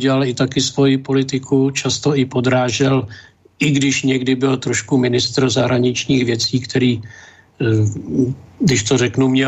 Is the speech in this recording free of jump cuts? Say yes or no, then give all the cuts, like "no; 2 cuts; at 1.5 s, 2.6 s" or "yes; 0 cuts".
yes; 0 cuts